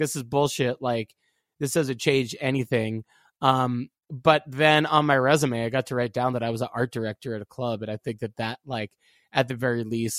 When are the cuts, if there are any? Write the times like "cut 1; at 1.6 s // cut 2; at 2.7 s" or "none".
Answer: none